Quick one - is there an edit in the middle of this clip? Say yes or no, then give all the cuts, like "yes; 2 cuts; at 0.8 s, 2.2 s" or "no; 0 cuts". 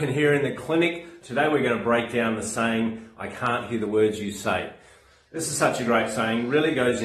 yes; 2 cuts; at 1.2 s, 3.2 s